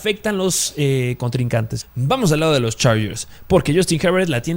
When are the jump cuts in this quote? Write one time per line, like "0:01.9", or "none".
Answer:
0:01.8